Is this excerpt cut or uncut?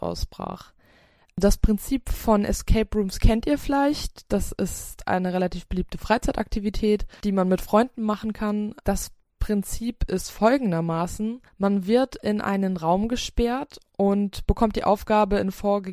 cut